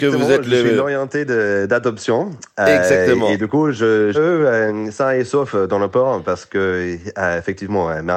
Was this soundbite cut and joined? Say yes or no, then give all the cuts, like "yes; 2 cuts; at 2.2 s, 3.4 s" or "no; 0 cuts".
yes; 1 cut; at 4.1 s